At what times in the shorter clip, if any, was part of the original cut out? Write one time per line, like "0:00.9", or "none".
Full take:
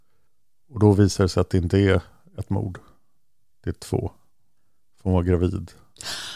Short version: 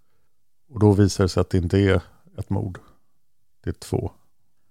none